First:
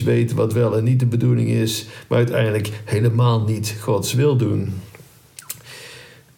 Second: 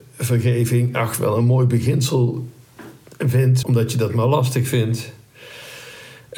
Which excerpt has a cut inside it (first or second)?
second